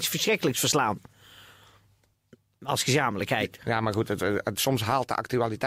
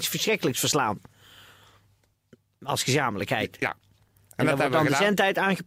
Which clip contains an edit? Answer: first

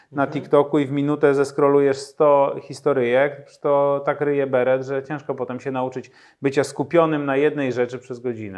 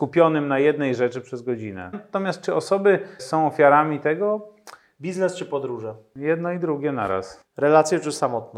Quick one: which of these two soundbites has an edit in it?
second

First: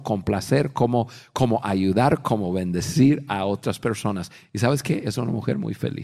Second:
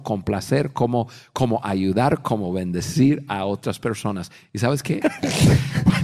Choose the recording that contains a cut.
second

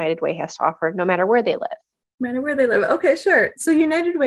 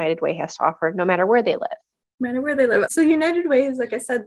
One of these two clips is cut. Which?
second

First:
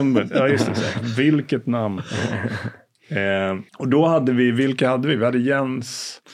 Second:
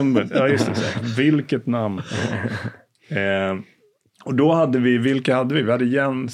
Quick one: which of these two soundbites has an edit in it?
first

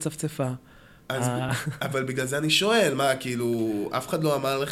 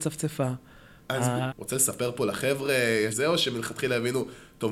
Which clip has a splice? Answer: second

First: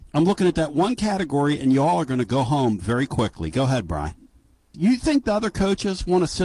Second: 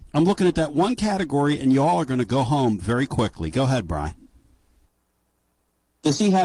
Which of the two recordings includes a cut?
first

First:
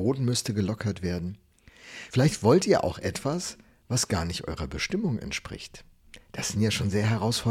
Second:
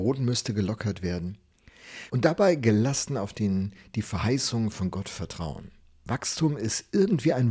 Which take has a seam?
second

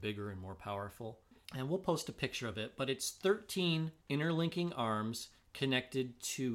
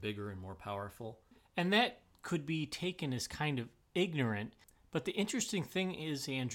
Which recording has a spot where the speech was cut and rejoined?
first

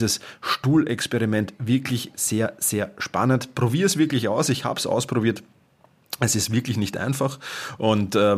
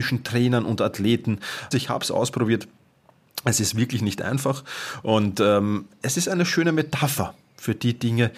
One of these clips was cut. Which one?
second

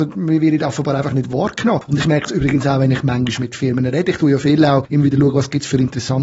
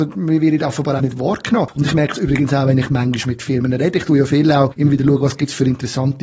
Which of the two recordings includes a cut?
second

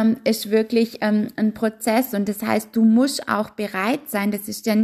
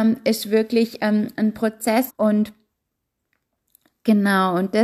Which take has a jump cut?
second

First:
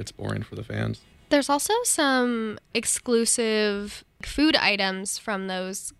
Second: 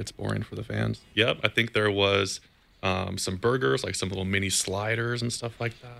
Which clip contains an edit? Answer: second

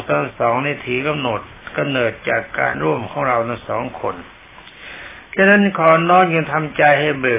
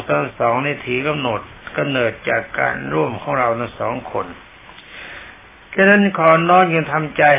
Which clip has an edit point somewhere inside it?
first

